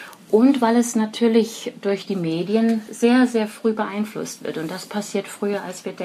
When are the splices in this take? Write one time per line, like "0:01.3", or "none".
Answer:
none

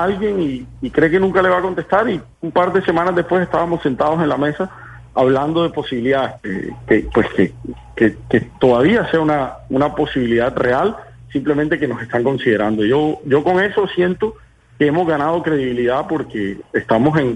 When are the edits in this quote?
0:02.3
0:06.4

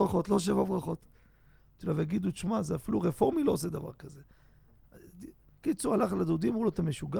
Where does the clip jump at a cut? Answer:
0:01.6

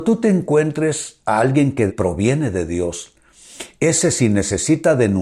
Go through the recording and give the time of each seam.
0:01.9

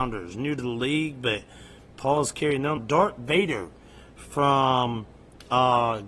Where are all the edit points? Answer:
0:02.8

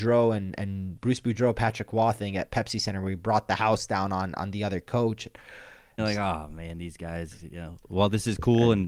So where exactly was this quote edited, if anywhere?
0:06.0

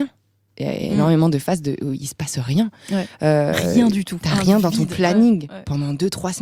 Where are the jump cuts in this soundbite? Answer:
none

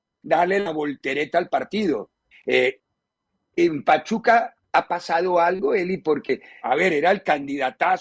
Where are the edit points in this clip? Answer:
0:02.3
0:06.6

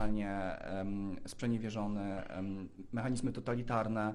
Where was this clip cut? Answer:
none

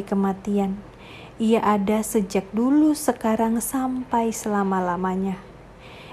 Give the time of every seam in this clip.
none

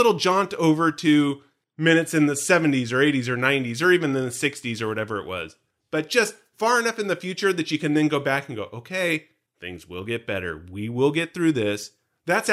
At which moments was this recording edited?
none

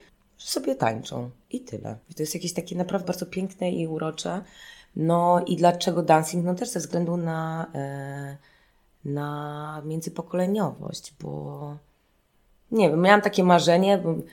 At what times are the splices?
0:02.0
0:03.0

